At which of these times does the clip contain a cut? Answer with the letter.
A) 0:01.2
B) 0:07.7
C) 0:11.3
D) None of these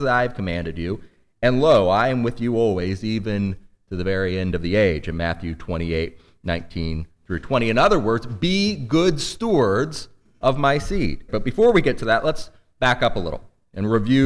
C